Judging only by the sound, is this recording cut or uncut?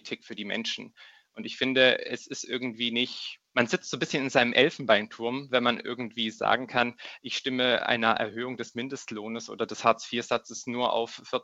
cut